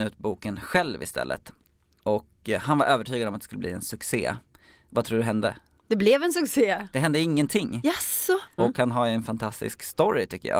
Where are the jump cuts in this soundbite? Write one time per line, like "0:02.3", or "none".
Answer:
0:08.6